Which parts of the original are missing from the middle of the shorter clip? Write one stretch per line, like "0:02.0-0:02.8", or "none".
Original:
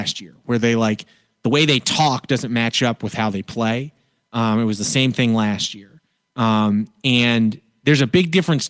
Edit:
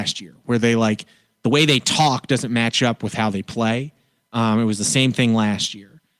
none